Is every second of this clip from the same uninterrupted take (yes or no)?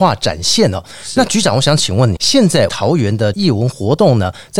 yes